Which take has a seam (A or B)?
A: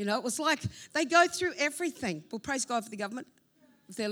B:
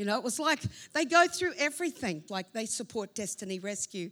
B